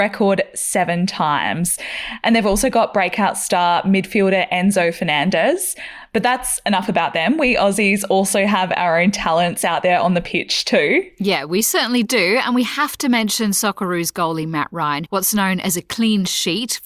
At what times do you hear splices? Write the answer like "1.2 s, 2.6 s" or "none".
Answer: 15.1 s